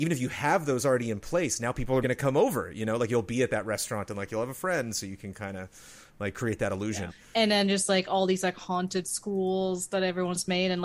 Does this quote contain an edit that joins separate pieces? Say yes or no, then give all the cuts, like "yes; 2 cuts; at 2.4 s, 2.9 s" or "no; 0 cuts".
yes; 2 cuts; at 2.0 s, 7.1 s